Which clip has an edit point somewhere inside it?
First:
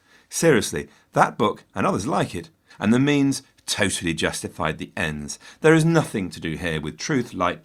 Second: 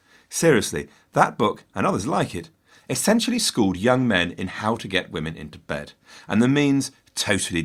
first; 1 cut; at 2.7 s

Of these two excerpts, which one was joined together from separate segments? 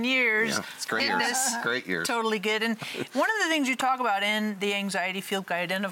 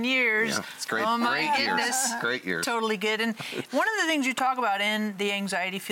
first; 1 cut; at 1.0 s

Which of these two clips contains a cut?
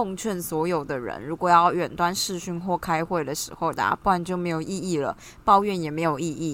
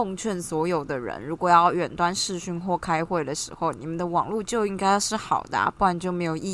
first; 1 cut; at 3.7 s

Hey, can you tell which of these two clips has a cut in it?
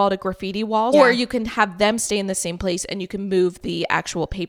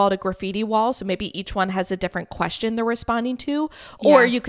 first; 1 cut; at 0.9 s

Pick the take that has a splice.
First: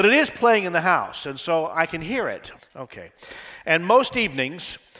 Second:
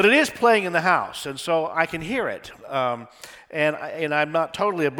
first; 1 cut; at 2.6 s

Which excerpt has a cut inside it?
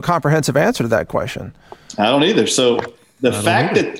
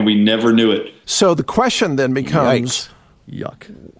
second; 1 cut; at 1.0 s

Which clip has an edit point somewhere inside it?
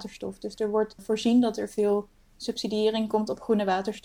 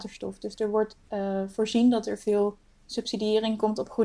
first; 1 cut; at 1.0 s

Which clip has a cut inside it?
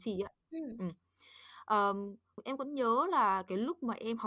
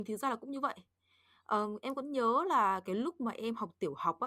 first; 1 cut; at 2.4 s

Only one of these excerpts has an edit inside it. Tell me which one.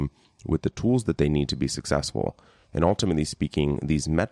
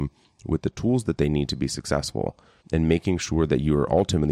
second; 1 cut; at 2.6 s

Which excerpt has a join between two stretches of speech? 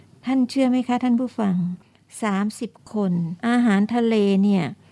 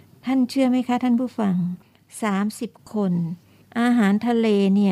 first; 1 cut; at 3.4 s

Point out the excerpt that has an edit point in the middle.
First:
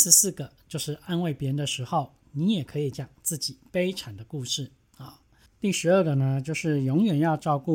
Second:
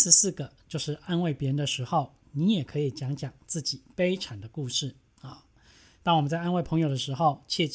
first; 2 cuts; at 2.9 s, 5.5 s

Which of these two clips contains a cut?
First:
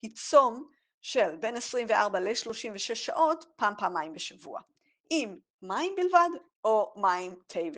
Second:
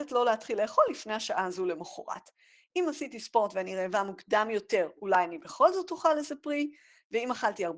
first; 1 cut; at 6.5 s

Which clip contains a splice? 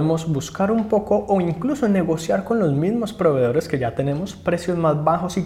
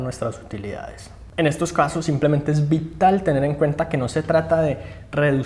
second; 1 cut; at 1.3 s

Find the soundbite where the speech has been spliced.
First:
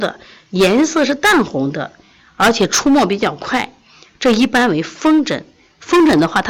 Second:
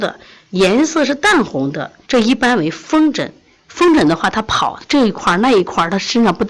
second; 1 cut; at 2.1 s

